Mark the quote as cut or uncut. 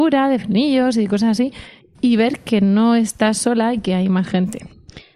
uncut